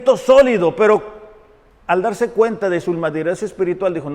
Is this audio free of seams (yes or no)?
yes